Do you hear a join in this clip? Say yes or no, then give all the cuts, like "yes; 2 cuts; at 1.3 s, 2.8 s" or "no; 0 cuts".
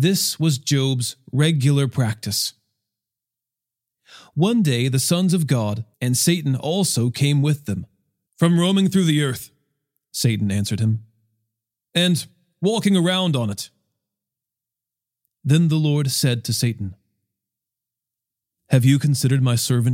yes; 2 cuts; at 5.9 s, 8.3 s